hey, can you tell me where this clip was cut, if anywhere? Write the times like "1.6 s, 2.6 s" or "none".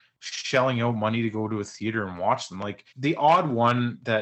2.9 s